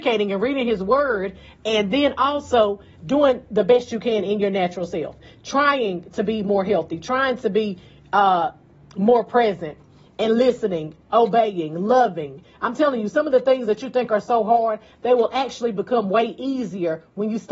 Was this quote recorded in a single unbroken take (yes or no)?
yes